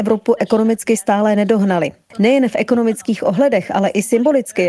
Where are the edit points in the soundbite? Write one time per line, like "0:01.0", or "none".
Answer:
0:02.1